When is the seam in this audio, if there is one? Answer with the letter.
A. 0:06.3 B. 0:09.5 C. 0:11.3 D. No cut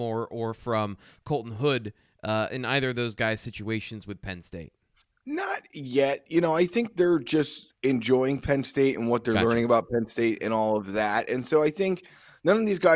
D